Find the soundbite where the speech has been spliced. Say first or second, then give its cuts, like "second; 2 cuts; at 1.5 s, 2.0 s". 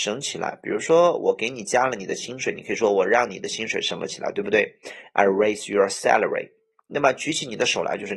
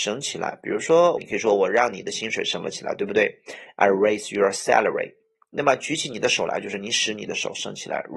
second; 1 cut; at 1.2 s